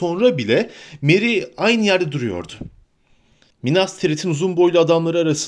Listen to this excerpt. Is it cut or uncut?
cut